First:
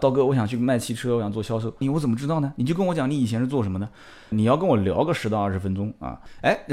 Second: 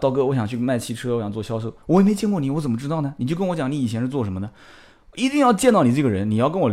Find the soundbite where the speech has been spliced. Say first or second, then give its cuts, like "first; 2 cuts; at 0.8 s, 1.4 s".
first; 2 cuts; at 1.8 s, 4.3 s